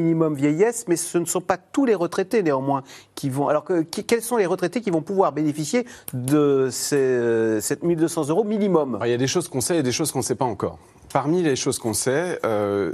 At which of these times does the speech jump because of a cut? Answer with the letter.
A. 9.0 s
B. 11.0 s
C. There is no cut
A